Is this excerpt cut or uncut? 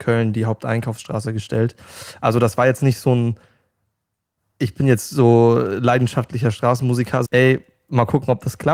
cut